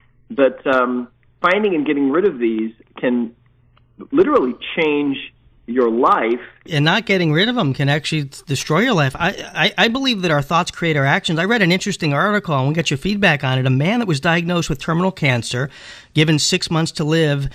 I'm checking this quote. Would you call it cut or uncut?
uncut